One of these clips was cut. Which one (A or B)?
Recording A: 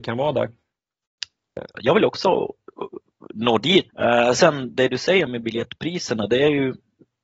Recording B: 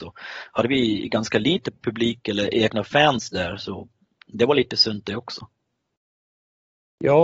A